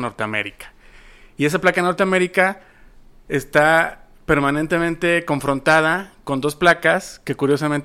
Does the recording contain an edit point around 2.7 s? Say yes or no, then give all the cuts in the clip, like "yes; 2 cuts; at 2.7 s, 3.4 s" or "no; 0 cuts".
no; 0 cuts